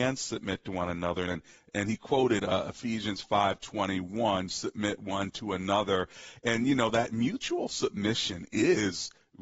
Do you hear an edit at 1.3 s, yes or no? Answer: yes